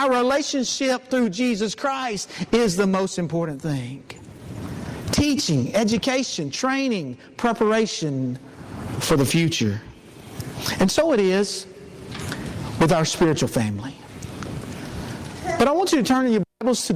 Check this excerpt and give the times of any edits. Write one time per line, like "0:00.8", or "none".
none